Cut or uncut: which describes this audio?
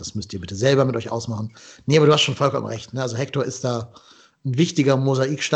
uncut